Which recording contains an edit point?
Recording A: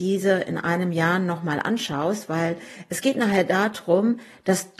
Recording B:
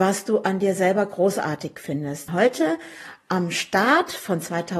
B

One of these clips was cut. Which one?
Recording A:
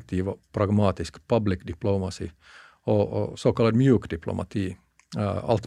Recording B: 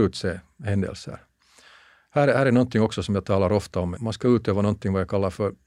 B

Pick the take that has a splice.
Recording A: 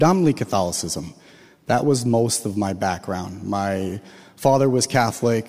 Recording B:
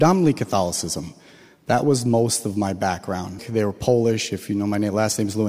B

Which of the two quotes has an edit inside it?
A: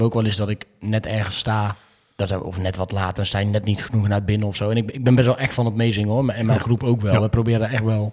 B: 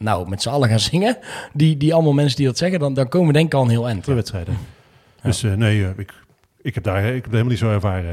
B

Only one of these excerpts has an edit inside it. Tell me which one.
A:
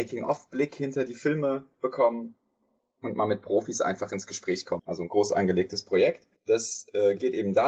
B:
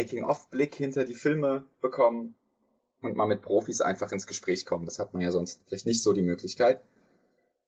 A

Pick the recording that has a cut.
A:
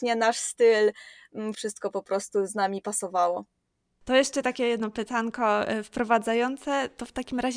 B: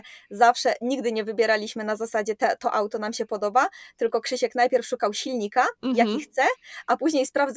A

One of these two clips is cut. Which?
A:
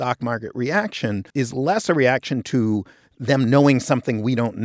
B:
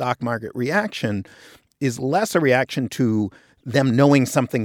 A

